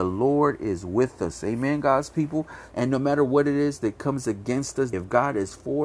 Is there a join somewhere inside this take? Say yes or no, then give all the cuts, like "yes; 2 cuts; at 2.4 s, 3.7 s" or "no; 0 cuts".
yes; 2 cuts; at 2.7 s, 4.9 s